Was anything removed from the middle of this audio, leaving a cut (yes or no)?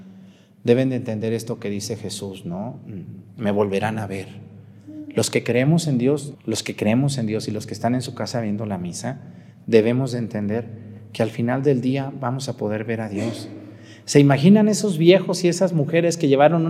yes